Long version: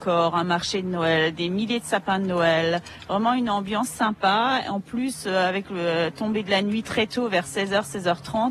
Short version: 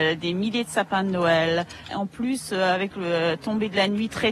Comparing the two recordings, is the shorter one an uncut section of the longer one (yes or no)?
no